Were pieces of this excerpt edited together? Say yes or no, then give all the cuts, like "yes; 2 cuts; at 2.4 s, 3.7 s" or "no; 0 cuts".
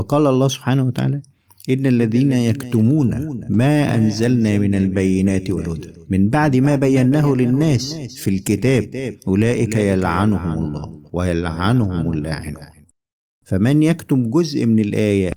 no; 0 cuts